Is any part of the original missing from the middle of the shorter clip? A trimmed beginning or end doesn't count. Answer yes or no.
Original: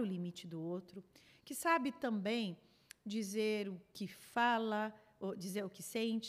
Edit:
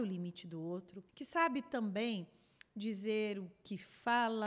yes